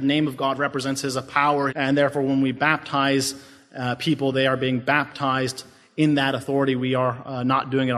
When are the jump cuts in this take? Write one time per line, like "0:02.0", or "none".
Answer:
0:01.7